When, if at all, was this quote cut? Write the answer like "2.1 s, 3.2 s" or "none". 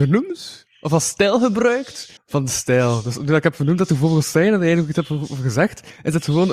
2.2 s